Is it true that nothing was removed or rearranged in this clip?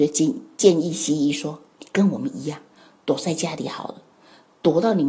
yes; 0 cuts

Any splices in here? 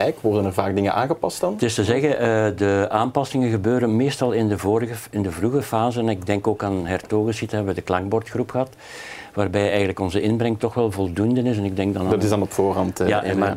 no; 0 cuts

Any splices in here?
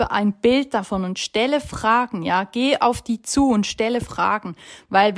no; 0 cuts

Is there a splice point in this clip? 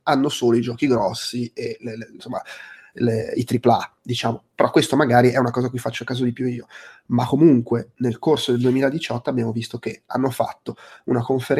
no; 0 cuts

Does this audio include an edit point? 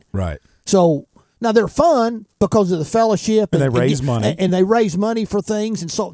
no; 0 cuts

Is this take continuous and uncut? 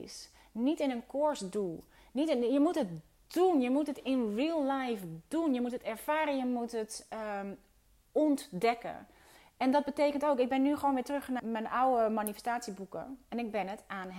no; 1 cut; at 11.4 s

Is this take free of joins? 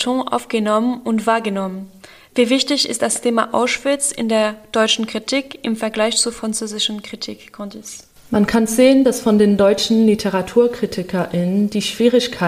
yes; 0 cuts

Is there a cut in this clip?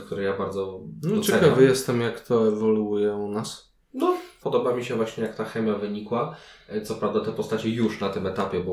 yes; 1 cut; at 4.4 s

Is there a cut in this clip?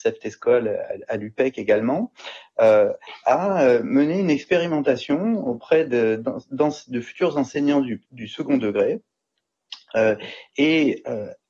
no; 0 cuts

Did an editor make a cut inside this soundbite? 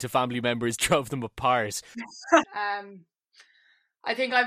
yes; 1 cut; at 2.4 s

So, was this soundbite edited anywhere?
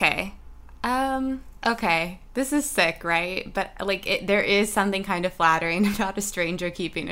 yes; 1 cut; at 1.6 s

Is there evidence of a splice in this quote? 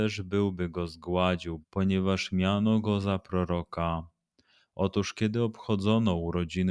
yes; 1 cut; at 1.6 s

